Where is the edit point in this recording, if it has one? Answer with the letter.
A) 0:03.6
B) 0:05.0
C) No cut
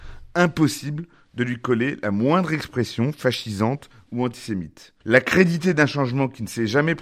B